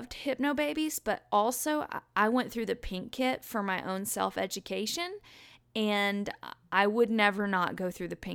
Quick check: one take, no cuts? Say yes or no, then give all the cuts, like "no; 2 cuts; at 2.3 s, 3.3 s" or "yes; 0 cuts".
yes; 0 cuts